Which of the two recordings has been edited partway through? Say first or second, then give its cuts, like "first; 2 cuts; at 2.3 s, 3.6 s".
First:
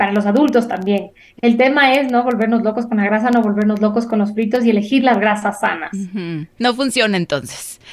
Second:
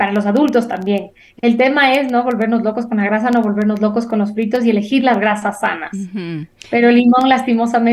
first; 1 cut; at 6.6 s